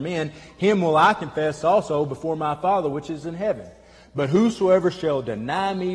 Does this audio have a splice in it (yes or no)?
no